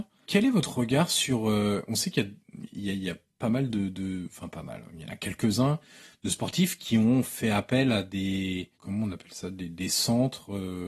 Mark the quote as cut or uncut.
uncut